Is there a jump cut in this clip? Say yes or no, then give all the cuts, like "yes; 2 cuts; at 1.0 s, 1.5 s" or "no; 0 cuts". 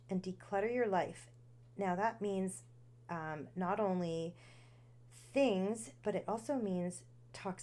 no; 0 cuts